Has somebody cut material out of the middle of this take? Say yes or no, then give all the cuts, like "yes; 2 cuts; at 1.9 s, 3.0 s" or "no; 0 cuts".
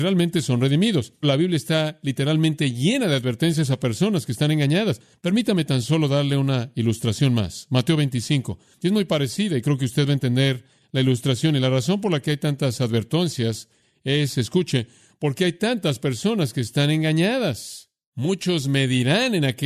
no; 0 cuts